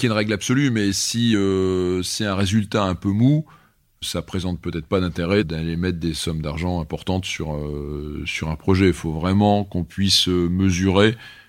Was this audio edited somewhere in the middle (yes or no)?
no